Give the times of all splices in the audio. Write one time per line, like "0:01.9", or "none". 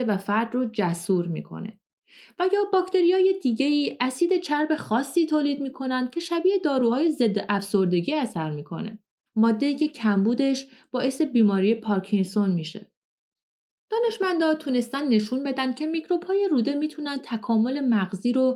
0:09.3